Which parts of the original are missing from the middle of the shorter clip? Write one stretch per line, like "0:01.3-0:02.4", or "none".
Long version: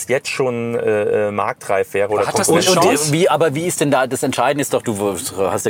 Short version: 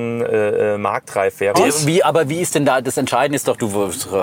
0:02.1-0:02.8